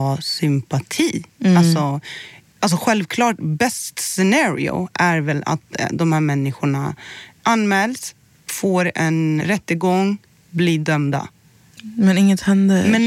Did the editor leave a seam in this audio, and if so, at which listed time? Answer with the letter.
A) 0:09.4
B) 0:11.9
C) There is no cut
A